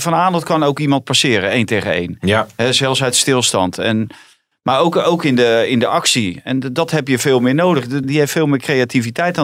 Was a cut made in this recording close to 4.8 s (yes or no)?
no